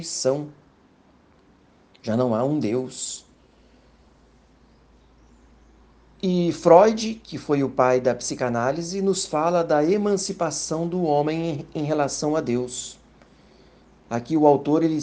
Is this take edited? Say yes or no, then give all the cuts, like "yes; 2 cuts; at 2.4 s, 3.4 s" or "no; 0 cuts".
no; 0 cuts